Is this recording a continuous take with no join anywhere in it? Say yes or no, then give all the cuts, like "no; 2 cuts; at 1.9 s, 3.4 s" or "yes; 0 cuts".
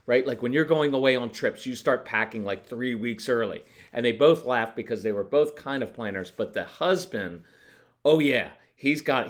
yes; 0 cuts